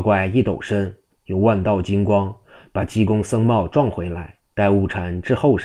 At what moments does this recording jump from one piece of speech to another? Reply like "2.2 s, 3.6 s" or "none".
4.5 s